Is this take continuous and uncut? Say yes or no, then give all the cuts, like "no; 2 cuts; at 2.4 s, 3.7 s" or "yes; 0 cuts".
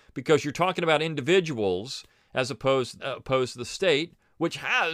no; 1 cut; at 3.0 s